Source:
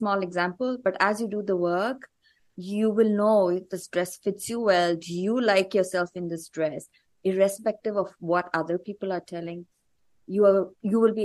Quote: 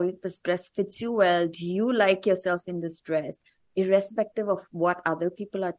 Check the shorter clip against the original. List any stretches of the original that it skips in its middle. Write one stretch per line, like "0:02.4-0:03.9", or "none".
none